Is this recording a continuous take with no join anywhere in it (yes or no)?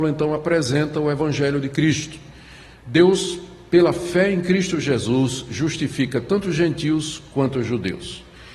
yes